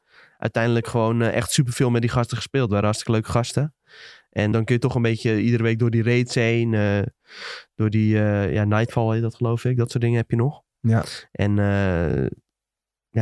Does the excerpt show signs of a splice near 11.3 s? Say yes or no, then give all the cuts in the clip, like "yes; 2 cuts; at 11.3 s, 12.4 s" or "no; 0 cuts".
no; 1 cut; at 4.5 s